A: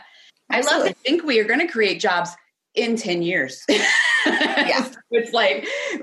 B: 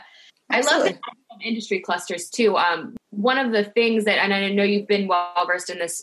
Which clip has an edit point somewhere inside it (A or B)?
A